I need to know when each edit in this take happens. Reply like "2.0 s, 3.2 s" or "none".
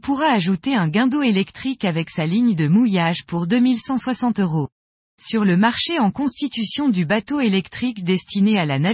5.1 s